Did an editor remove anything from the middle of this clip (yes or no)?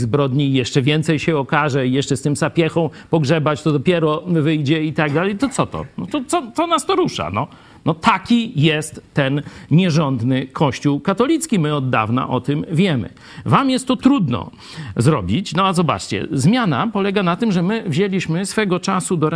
no